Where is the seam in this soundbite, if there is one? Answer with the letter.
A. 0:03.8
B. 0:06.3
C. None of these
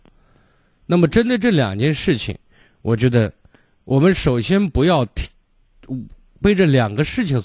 C